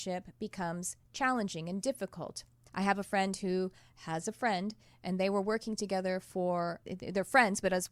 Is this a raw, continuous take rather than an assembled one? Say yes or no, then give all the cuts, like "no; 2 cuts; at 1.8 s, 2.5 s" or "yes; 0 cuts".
no; 2 cuts; at 2.7 s, 6.8 s